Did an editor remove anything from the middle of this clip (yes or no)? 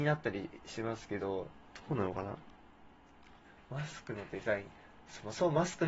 no